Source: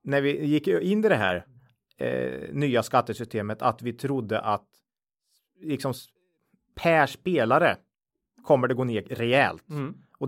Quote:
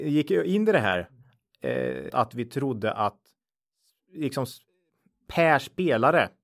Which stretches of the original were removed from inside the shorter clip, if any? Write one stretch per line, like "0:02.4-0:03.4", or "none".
0:02.5-0:03.6